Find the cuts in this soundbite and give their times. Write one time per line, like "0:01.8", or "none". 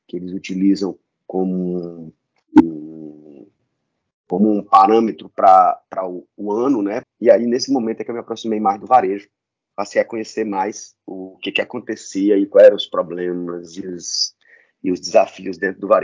0:07.0